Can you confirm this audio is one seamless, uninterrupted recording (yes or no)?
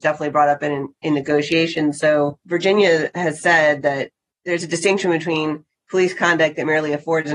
yes